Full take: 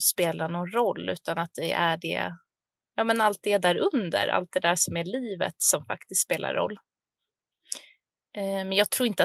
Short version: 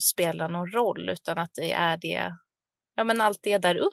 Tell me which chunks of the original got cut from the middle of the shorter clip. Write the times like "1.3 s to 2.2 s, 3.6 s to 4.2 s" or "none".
none